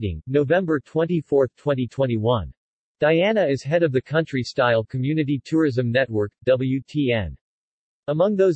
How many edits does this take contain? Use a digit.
2